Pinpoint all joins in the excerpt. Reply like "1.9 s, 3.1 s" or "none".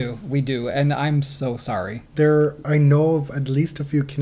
none